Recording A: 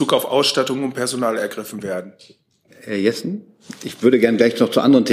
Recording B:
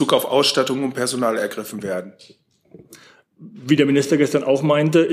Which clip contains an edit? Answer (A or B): A